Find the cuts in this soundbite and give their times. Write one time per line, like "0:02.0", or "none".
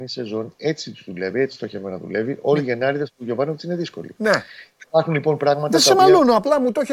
none